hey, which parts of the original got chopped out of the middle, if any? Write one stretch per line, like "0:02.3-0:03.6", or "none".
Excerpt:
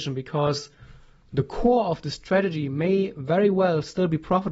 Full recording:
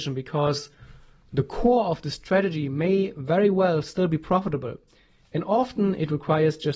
none